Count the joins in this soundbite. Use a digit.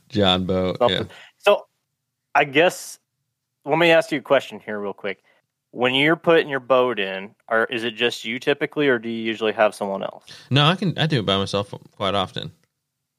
0